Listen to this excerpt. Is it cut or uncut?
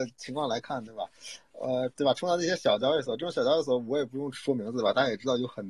cut